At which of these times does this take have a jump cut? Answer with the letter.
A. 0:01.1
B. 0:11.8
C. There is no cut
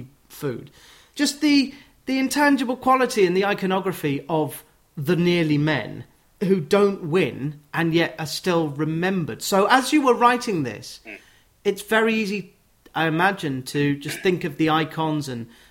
A